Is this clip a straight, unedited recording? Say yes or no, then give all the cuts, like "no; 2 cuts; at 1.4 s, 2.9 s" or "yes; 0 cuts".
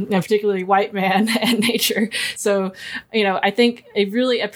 yes; 0 cuts